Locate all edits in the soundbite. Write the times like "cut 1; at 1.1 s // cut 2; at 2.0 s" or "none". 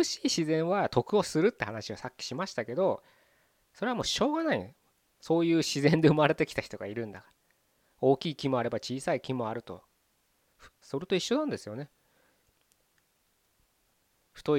cut 1; at 10.8 s